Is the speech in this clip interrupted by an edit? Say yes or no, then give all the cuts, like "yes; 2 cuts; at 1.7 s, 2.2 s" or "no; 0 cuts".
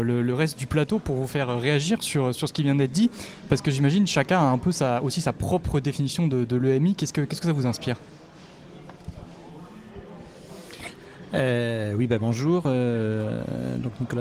no; 0 cuts